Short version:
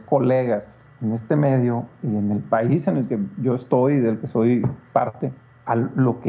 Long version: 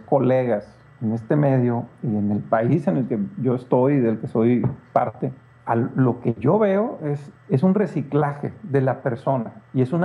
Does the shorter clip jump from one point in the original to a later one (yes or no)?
no